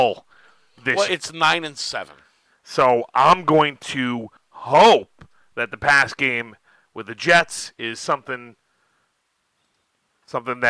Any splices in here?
yes; 2 cuts; at 1.1 s, 4.4 s

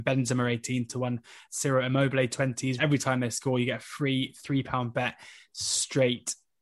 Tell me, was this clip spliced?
yes; 2 cuts; at 1.5 s, 2.8 s

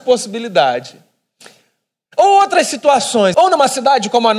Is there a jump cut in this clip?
yes; 2 cuts; at 2.1 s, 3.3 s

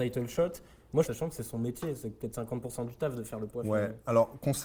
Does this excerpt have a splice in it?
yes; 1 cut; at 1.0 s

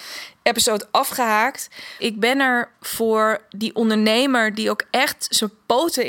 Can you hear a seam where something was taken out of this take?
yes; 1 cut; at 2.0 s

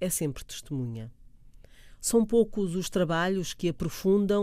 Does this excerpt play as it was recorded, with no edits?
no; 1 cut; at 2.0 s

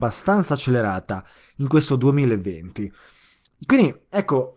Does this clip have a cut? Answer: yes; 1 cut; at 3.5 s

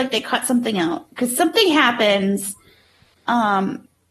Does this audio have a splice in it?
no; 0 cuts

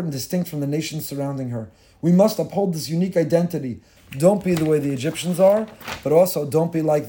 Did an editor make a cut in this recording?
yes; 1 cut; at 4.0 s

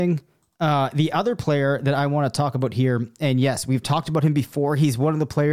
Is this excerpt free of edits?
yes; 0 cuts

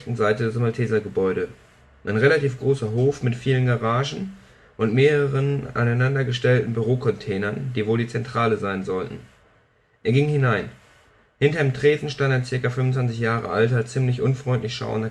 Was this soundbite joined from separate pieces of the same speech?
no; 0 cuts

